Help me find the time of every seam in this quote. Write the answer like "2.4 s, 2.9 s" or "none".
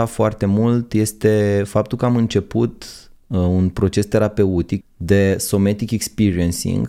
4.8 s